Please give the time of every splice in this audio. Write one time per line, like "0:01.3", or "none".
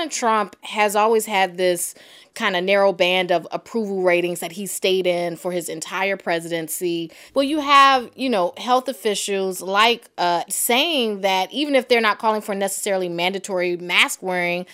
0:07.3
0:10.5